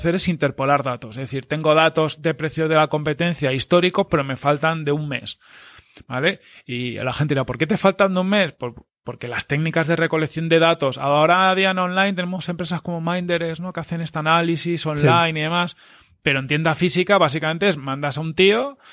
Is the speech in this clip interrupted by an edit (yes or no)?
no